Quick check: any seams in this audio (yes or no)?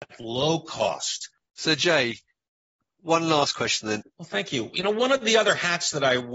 yes